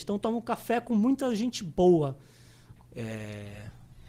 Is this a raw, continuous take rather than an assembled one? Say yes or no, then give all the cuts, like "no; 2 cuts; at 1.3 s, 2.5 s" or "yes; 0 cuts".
no; 1 cut; at 2.8 s